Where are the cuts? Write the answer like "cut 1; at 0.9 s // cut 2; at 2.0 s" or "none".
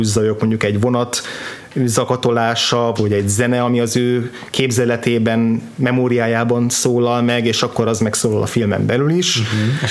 cut 1; at 3.0 s